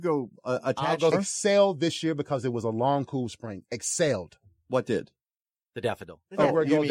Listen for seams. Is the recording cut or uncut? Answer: cut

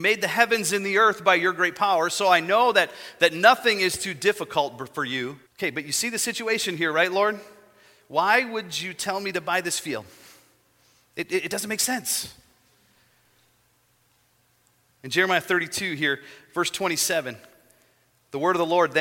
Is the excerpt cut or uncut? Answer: cut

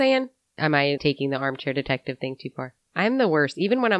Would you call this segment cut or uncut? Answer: cut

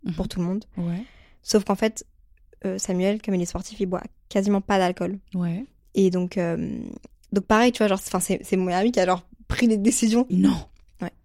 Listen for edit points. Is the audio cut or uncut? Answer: cut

